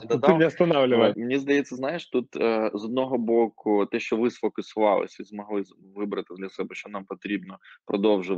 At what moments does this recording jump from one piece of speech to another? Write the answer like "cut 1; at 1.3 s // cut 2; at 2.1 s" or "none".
cut 1; at 1.1 s